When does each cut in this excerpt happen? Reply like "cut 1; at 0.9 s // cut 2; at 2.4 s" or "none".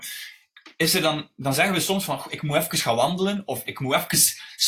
none

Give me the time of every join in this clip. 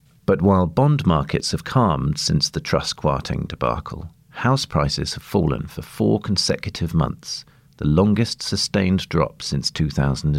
none

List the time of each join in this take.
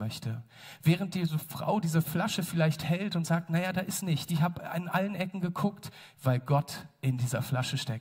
cut 1; at 4.3 s // cut 2; at 6.1 s

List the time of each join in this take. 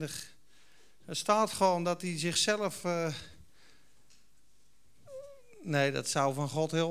none

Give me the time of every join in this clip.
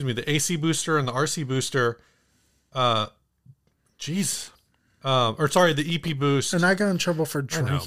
none

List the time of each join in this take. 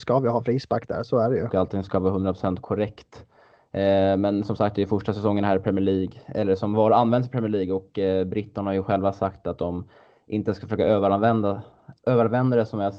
cut 1; at 1.5 s

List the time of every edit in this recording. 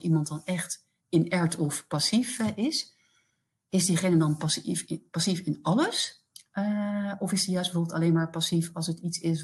none

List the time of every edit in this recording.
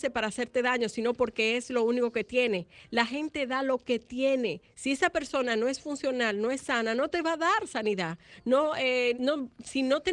cut 1; at 9.1 s

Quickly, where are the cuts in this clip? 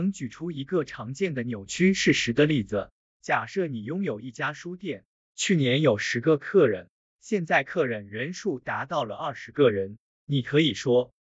none

